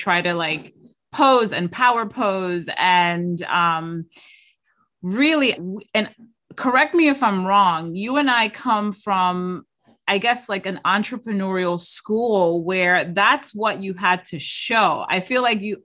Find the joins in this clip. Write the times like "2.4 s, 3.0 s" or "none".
5.6 s